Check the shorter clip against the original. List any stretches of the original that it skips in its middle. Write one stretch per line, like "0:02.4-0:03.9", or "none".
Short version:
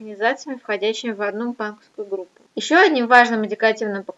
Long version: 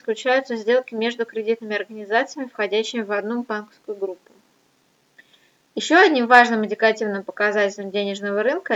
0:04.4-0:05.7